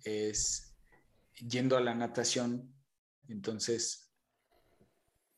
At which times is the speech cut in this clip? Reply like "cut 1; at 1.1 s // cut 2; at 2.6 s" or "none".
cut 1; at 1.2 s // cut 2; at 3.2 s